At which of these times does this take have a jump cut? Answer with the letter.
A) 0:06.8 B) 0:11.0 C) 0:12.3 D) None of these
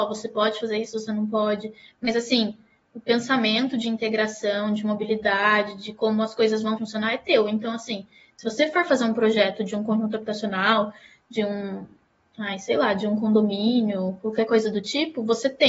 A